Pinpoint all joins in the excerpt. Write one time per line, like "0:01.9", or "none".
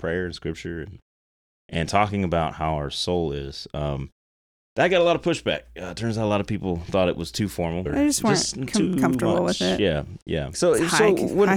0:07.9
0:10.5